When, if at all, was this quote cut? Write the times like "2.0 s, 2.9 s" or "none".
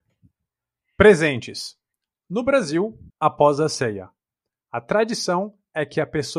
3.1 s